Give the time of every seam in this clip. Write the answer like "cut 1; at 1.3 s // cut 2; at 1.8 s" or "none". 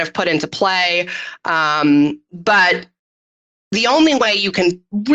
none